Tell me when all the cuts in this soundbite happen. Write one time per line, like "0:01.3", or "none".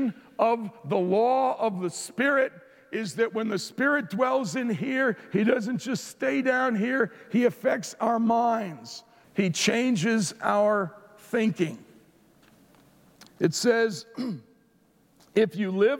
0:09.2
0:13.3